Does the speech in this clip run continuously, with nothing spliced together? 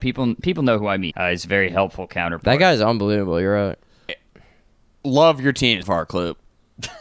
no; 3 cuts; at 1.1 s, 4.1 s, 5.8 s

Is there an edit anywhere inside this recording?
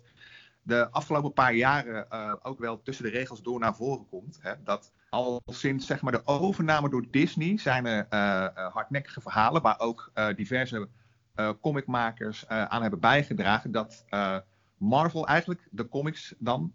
yes; 1 cut; at 4.9 s

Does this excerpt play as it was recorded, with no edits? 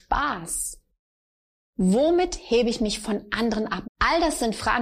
no; 1 cut; at 3.8 s

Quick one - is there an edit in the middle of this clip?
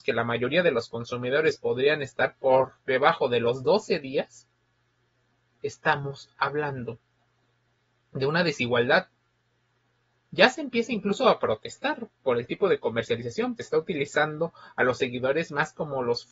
yes; 1 cut; at 13.6 s

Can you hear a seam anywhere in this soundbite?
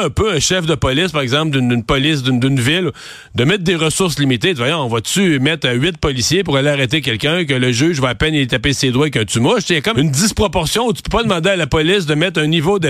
yes; 1 cut; at 9.9 s

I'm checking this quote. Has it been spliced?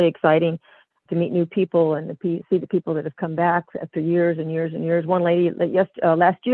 yes; 1 cut; at 1.1 s

